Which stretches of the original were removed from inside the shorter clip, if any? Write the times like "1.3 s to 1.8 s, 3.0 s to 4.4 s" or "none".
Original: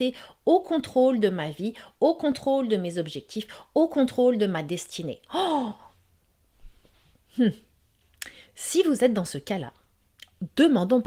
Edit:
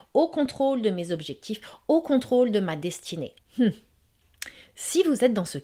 5.3 s to 7.2 s

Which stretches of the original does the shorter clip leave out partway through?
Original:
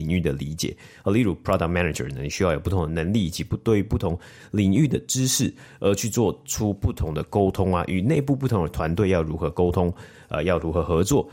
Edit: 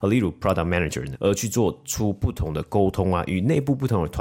2.2 s to 5.8 s

